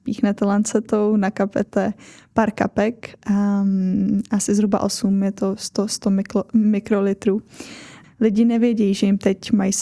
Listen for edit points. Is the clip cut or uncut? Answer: cut